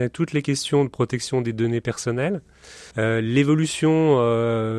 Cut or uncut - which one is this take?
cut